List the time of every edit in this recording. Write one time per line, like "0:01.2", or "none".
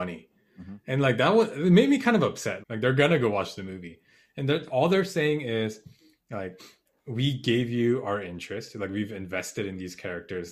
0:02.6